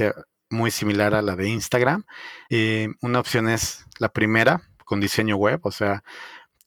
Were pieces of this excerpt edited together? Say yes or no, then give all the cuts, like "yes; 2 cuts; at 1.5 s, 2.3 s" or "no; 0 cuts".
yes; 2 cuts; at 2.5 s, 4.8 s